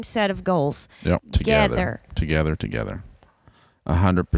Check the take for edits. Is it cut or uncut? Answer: cut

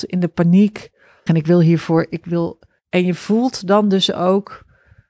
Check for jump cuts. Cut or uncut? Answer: cut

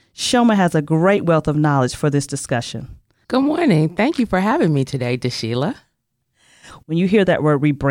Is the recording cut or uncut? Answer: cut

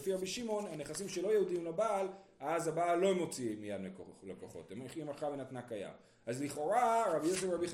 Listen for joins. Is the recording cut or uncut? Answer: uncut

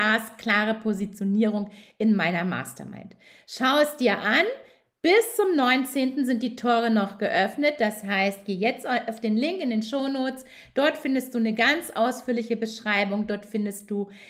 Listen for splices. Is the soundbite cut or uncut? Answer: uncut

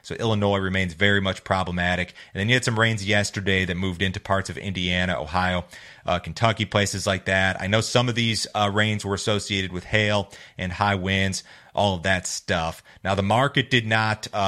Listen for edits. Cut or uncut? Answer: uncut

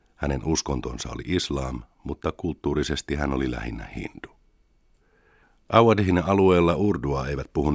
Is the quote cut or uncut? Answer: uncut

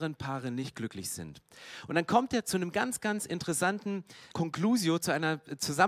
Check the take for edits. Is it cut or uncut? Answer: cut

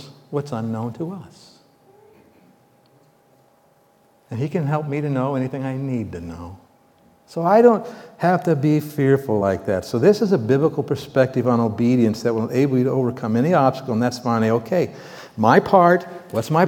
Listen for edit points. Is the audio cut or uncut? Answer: uncut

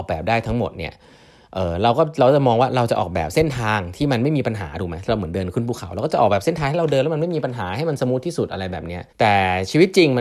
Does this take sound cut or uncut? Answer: cut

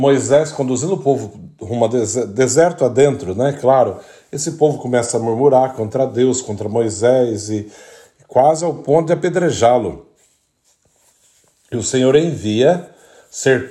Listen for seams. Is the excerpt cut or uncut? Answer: uncut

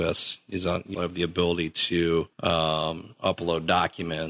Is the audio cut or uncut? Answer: cut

